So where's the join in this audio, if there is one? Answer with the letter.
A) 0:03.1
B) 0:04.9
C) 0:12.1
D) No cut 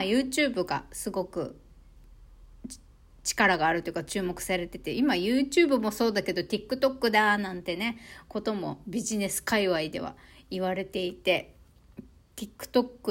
D